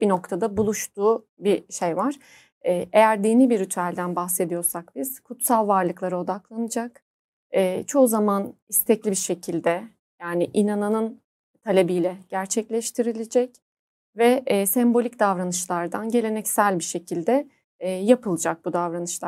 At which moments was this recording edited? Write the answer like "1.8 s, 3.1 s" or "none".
none